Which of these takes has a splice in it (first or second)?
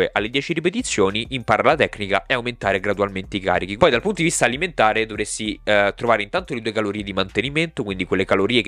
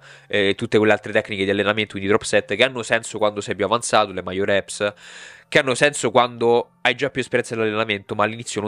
first